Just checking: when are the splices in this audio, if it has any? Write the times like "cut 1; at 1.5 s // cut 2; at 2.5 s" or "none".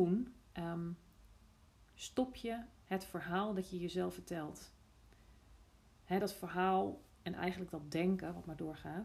none

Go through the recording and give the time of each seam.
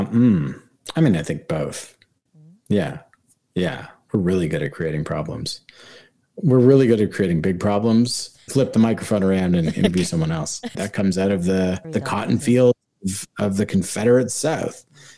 cut 1; at 8.5 s // cut 2; at 10.7 s // cut 3; at 11.8 s

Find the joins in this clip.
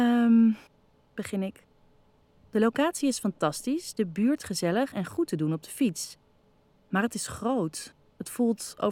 none

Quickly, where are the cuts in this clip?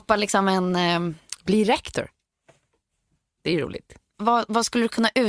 cut 1; at 4.1 s

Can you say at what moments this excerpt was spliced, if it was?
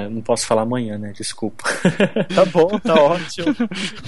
cut 1; at 2.3 s

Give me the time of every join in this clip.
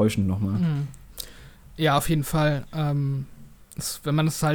none

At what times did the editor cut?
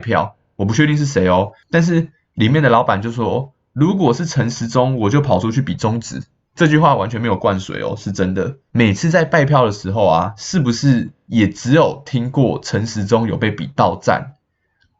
cut 1; at 8.7 s

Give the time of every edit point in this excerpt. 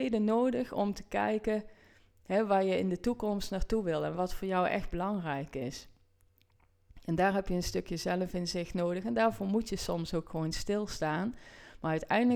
none

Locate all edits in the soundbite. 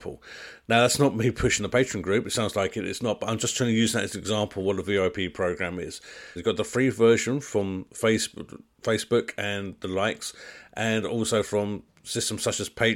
cut 1; at 6.4 s

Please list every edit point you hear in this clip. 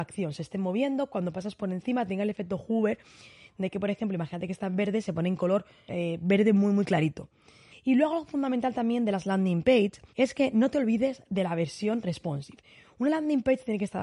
cut 1; at 5.9 s // cut 2; at 7.7 s // cut 3; at 10.1 s

